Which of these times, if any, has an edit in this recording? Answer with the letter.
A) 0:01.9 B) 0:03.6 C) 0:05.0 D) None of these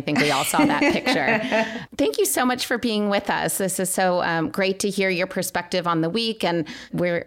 A